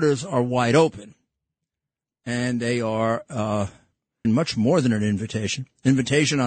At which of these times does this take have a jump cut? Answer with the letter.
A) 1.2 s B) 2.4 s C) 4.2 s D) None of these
C